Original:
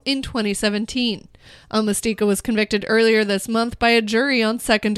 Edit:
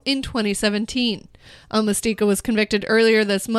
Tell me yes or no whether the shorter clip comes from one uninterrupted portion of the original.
yes